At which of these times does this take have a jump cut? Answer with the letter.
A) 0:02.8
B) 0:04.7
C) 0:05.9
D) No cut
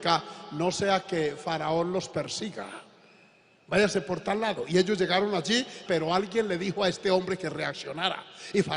C